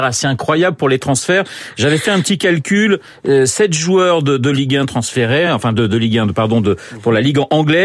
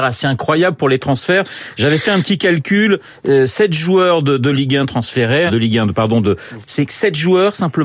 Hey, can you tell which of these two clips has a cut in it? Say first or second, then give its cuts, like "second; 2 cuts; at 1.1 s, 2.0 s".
second; 2 cuts; at 5.5 s, 6.6 s